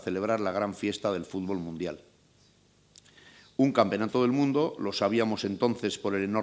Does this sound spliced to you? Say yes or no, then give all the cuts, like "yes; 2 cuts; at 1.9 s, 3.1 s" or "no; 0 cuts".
no; 0 cuts